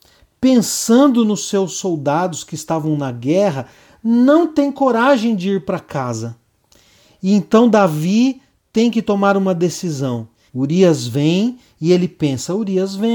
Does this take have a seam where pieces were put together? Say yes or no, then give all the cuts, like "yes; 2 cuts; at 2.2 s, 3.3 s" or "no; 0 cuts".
yes; 1 cut; at 10.5 s